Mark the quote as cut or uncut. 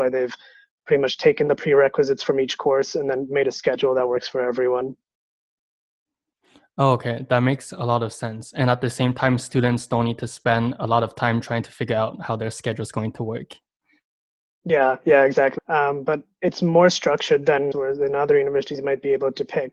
cut